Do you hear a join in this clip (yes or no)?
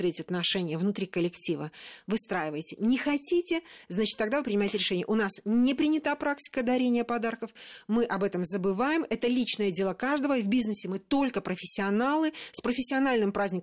no